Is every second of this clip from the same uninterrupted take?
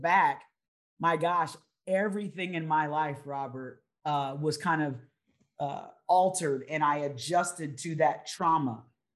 yes; 0 cuts

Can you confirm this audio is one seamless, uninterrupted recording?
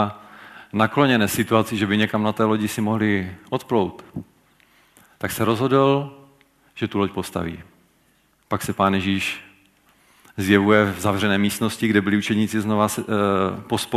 no; 1 cut; at 8.3 s

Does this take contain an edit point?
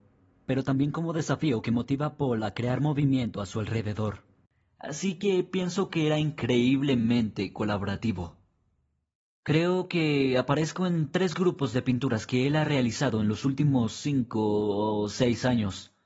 no; 0 cuts

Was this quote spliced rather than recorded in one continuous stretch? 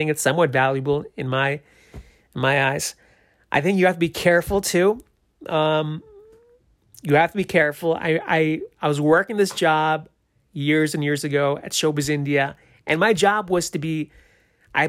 no; 0 cuts

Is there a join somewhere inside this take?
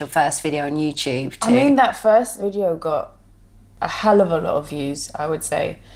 no; 0 cuts

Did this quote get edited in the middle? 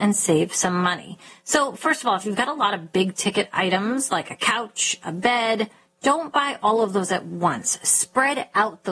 no; 0 cuts

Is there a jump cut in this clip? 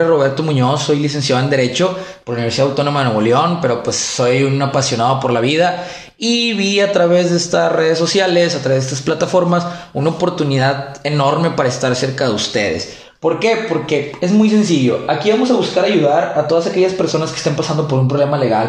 no; 0 cuts

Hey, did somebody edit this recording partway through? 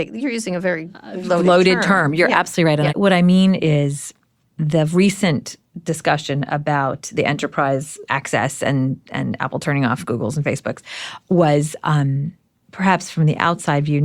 yes; 2 cuts; at 2.9 s, 8.0 s

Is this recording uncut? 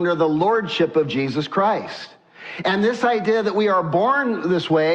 yes; 0 cuts

